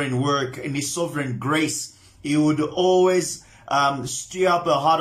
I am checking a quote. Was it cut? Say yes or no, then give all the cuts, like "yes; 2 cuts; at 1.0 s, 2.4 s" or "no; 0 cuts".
no; 0 cuts